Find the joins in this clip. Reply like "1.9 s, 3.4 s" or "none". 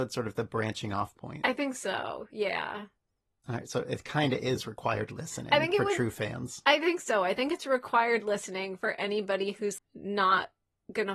9.8 s